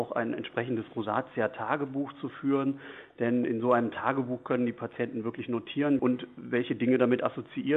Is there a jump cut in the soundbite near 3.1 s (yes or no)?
no